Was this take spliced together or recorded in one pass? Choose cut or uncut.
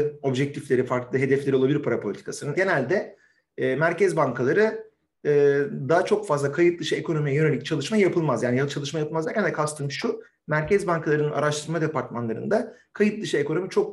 cut